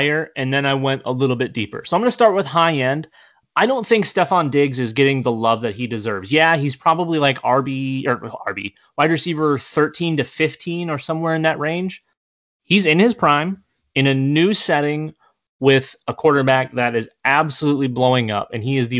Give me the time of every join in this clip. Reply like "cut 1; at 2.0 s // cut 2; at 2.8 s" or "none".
none